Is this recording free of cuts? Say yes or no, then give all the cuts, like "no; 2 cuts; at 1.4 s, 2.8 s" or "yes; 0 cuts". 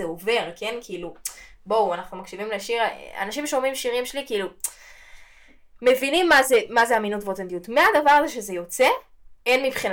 yes; 0 cuts